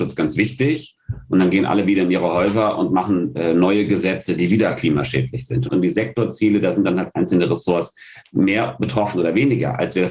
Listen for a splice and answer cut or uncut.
cut